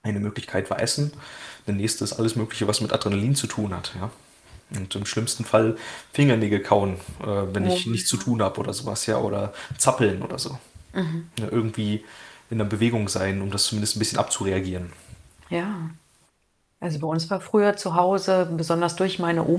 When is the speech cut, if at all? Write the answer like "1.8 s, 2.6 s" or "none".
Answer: none